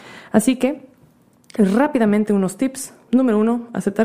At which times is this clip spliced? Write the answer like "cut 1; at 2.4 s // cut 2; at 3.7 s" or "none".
none